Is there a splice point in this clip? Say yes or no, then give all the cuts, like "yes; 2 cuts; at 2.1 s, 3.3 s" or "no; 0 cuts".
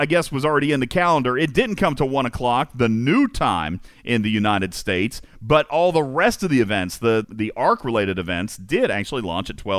yes; 1 cut; at 7.2 s